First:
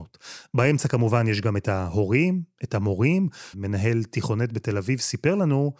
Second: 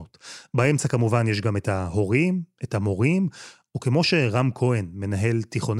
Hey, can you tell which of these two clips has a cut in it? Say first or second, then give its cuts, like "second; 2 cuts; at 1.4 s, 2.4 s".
first; 1 cut; at 3.5 s